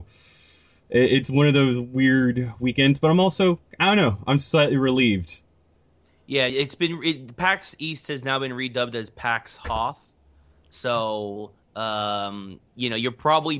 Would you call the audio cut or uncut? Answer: uncut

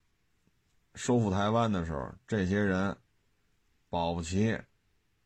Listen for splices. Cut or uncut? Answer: uncut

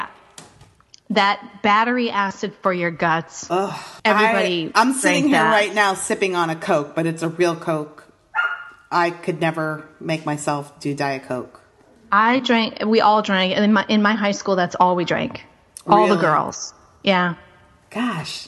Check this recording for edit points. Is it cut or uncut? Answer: cut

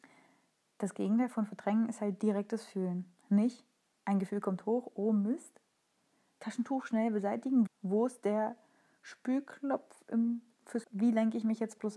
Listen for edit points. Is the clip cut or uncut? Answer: cut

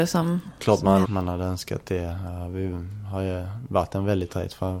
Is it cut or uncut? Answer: cut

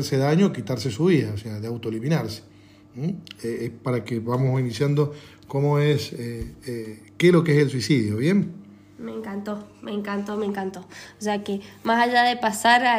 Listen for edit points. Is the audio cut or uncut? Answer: uncut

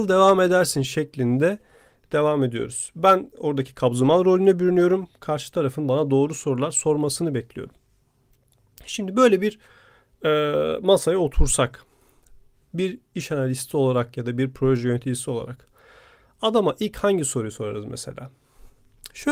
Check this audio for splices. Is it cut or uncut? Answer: uncut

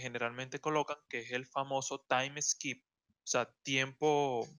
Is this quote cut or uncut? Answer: uncut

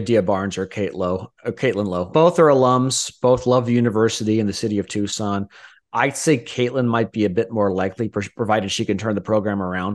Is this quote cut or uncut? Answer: cut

